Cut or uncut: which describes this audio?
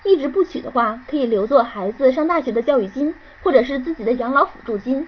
uncut